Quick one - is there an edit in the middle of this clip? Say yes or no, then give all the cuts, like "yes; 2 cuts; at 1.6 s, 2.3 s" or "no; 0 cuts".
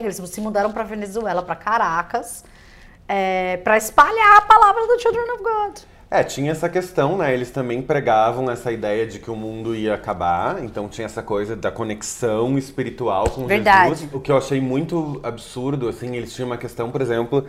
no; 0 cuts